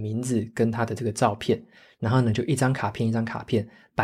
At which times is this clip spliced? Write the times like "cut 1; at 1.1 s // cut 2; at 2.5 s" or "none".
none